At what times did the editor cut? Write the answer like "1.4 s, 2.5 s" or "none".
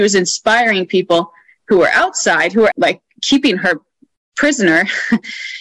2.7 s